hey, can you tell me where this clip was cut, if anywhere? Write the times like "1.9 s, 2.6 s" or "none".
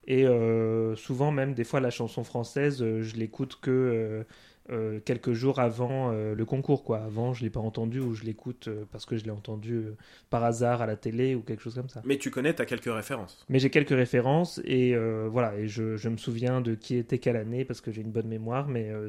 none